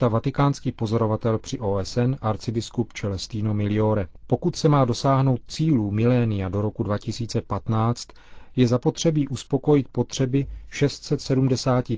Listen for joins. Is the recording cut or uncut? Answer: uncut